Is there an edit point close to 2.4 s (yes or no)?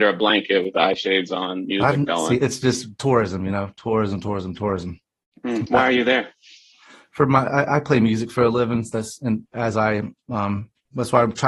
yes